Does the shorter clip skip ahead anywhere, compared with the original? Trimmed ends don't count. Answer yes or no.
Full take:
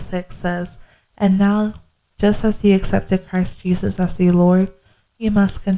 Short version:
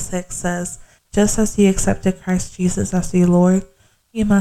yes